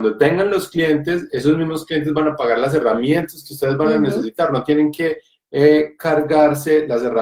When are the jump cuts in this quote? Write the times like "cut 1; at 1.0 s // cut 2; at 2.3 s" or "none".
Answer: none